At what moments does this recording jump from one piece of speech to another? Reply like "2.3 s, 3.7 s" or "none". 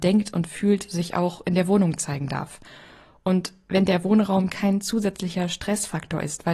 none